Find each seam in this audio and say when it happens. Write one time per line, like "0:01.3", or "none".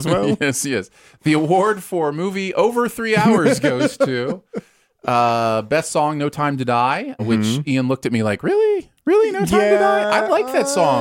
0:07.2